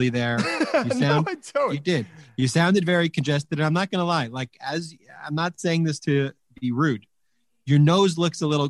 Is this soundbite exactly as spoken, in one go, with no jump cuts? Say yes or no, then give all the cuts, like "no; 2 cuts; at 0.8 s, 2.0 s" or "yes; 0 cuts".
yes; 0 cuts